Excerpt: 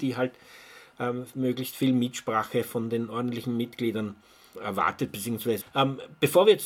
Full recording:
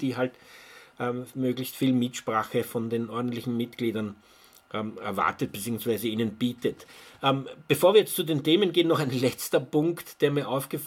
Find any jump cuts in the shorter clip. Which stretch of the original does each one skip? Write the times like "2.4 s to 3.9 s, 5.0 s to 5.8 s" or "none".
4.5 s to 5.0 s, 6.0 s to 7.1 s